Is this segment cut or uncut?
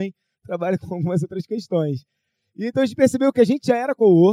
uncut